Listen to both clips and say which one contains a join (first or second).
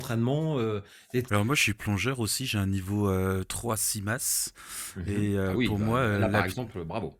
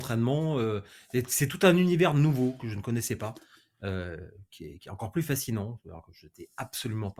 first